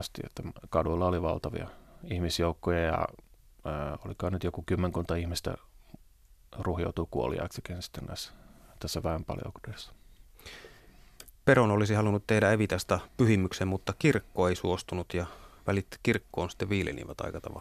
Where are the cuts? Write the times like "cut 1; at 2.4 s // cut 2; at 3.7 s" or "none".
none